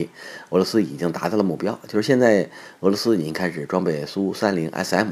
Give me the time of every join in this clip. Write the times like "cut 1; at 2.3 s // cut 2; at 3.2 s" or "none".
none